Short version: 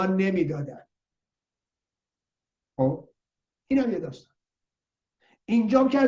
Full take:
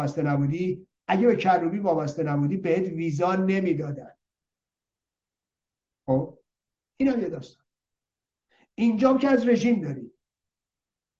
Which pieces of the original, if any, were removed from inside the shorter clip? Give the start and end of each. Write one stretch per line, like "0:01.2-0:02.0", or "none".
none